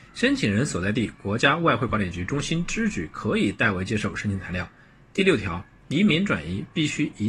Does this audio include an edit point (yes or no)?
no